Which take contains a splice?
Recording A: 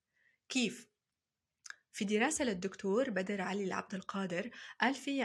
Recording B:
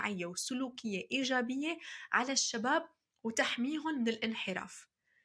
A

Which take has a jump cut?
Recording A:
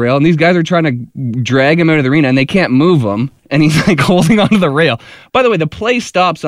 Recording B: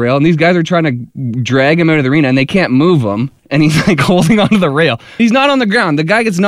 B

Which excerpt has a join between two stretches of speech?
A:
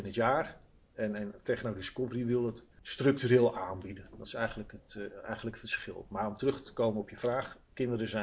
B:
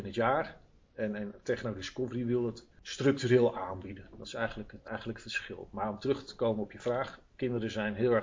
B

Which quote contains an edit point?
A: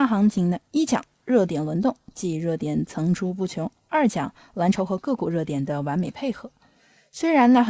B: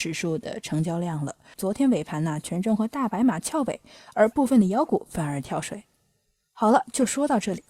B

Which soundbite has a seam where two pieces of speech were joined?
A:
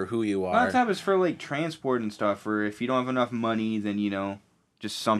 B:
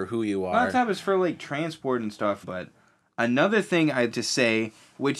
B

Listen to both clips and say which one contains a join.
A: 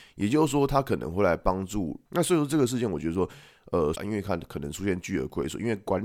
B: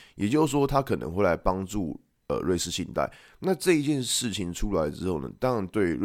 A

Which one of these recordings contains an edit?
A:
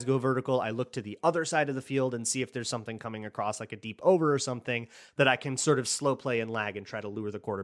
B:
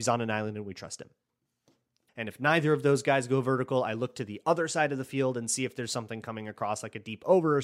B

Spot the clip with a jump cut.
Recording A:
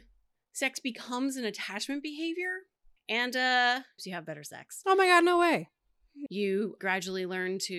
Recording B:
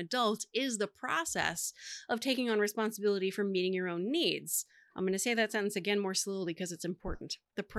A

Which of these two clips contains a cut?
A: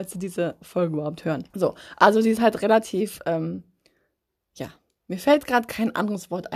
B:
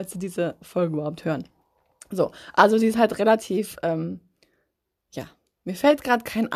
A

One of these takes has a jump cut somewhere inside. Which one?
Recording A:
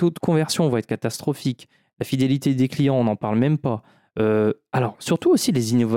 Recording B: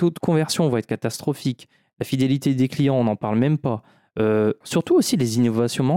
B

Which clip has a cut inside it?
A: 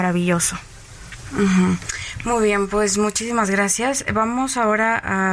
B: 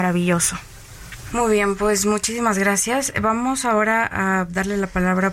B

